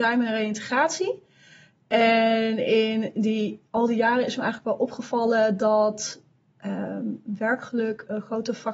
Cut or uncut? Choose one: uncut